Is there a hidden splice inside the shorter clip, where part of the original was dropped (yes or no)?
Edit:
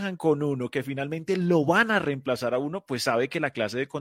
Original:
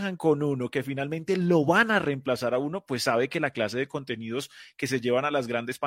no